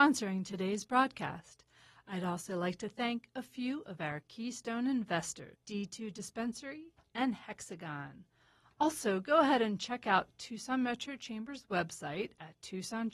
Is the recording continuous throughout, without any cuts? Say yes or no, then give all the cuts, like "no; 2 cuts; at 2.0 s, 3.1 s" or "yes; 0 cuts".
no; 1 cut; at 5.5 s